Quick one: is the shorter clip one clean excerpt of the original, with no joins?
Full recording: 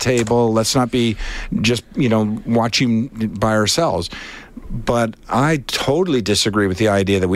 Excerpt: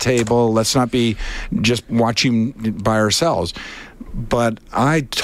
no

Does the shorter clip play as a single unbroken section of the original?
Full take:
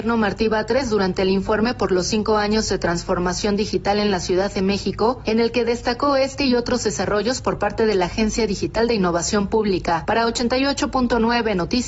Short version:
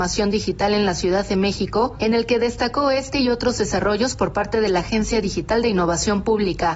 yes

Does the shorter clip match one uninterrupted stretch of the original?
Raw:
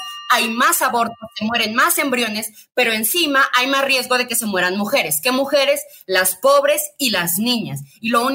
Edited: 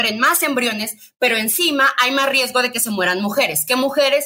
yes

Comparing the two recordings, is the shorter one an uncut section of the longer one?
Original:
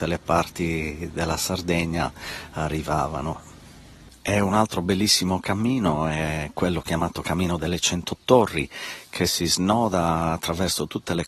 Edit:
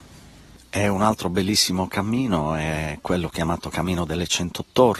yes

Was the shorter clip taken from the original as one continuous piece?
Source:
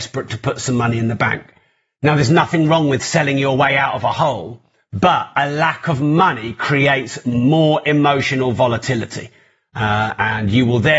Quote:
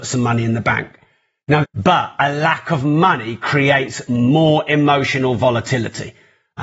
no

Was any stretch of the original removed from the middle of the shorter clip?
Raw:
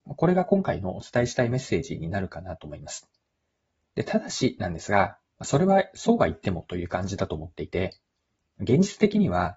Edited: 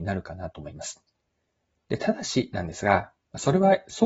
no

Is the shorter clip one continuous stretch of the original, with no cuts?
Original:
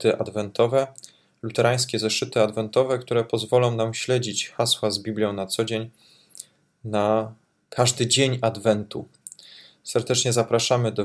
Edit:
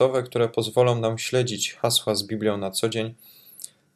yes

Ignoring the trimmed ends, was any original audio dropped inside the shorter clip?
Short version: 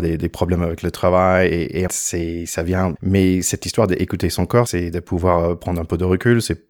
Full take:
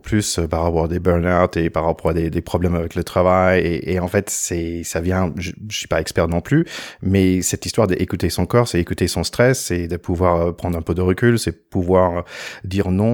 yes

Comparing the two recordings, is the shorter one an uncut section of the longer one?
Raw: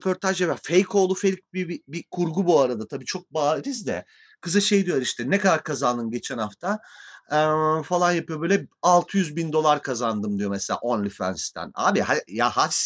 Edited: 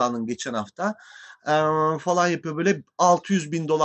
yes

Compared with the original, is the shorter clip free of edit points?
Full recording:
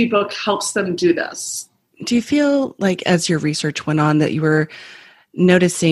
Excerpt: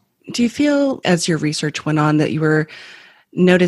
no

